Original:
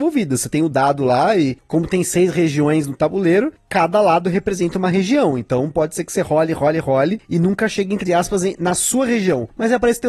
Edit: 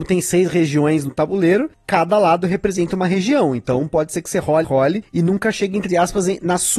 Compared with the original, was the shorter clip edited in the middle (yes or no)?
yes